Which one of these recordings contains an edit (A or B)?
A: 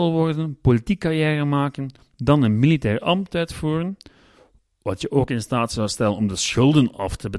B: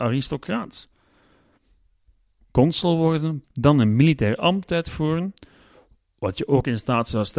B